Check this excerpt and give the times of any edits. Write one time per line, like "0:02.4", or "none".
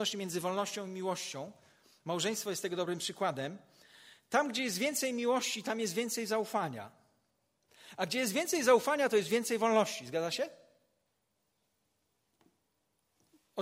none